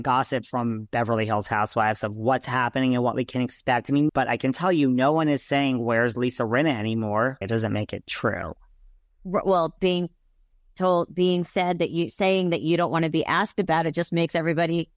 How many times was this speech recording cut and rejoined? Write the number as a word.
two